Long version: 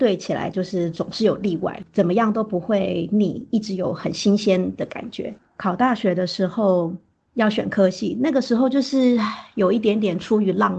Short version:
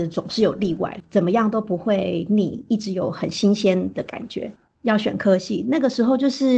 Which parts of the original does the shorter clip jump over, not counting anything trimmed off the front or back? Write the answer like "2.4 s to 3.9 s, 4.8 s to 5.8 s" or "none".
5.5 s to 7.2 s